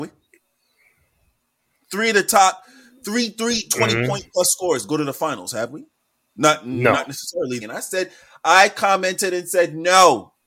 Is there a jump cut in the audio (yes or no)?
yes